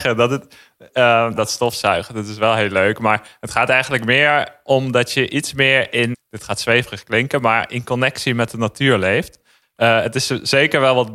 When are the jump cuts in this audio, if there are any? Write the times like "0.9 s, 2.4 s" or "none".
1.4 s, 6.1 s, 9.6 s